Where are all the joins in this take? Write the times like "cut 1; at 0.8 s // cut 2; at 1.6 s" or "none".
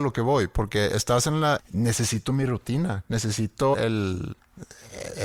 cut 1; at 1.6 s // cut 2; at 3.7 s